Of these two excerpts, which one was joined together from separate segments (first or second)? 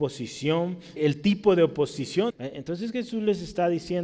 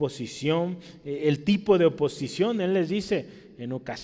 first